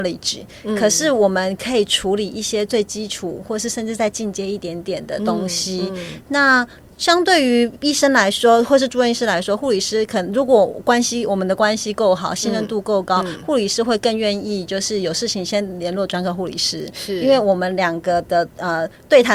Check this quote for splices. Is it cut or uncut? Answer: uncut